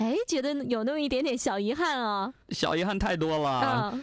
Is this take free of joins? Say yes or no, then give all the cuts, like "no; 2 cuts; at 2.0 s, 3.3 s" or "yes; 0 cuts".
yes; 0 cuts